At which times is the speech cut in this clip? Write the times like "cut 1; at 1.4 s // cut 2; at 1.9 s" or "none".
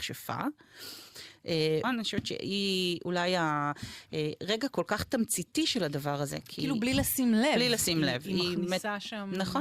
cut 1; at 1.8 s